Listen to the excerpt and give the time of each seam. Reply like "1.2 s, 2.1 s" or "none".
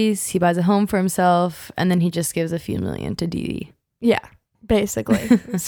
none